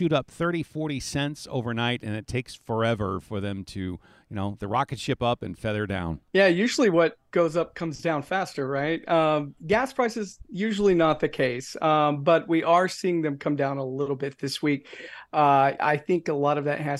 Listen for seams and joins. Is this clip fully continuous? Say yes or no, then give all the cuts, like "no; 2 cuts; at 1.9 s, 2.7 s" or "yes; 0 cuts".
no; 2 cuts; at 6.3 s, 15.8 s